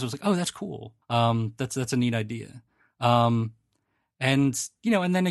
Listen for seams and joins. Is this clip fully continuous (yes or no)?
no